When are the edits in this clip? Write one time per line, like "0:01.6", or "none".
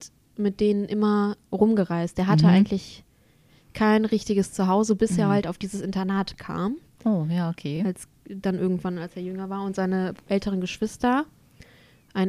none